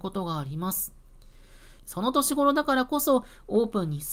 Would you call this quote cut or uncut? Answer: cut